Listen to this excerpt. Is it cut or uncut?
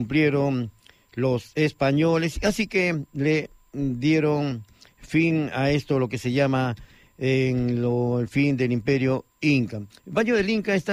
cut